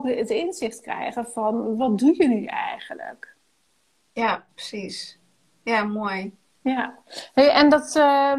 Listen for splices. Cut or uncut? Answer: uncut